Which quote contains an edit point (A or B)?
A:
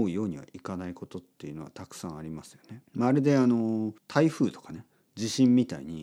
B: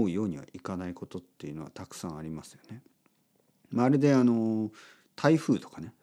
A